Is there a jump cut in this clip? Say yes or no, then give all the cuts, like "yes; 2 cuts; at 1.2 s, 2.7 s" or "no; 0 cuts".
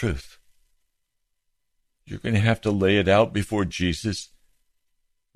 no; 0 cuts